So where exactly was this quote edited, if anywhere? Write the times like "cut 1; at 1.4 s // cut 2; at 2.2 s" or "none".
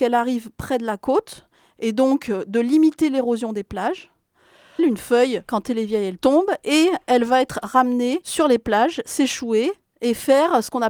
cut 1; at 4.8 s